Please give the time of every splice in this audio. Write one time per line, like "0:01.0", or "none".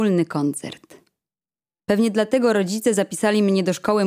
0:01.8